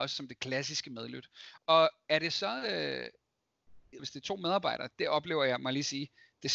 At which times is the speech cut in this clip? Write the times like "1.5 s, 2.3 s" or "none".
1.6 s, 4.0 s